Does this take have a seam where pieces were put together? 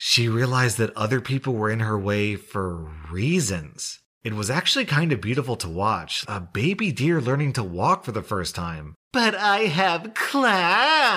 yes; 2 cuts; at 6.2 s, 9.0 s

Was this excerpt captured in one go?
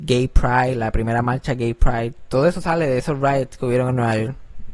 yes; 0 cuts

